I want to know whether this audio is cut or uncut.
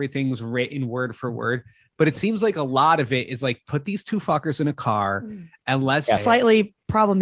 cut